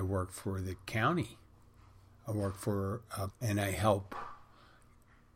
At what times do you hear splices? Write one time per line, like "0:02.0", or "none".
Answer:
0:03.3